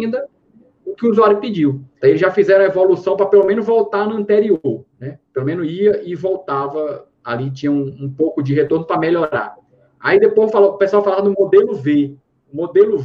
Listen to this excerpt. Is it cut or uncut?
cut